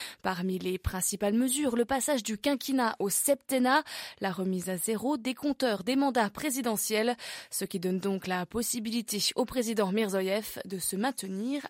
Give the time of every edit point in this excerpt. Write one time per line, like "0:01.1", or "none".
none